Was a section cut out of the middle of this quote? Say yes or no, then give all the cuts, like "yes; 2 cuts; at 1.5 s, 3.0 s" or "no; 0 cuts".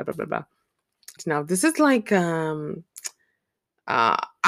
yes; 1 cut; at 1.2 s